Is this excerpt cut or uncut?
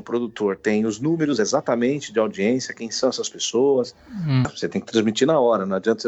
cut